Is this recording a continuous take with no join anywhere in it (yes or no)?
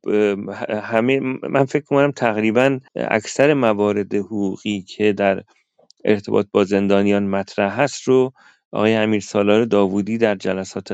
no